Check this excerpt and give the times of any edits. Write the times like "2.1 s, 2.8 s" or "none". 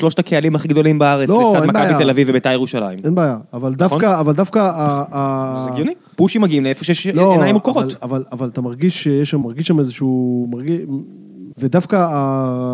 9.4 s, 11.5 s